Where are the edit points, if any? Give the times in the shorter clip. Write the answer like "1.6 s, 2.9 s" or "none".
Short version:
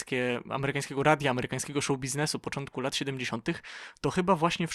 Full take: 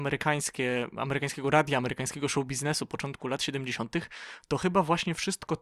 none